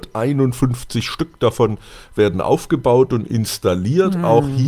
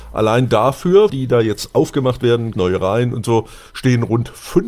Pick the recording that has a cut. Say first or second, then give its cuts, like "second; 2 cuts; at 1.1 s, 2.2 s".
second; 2 cuts; at 1.1 s, 2.5 s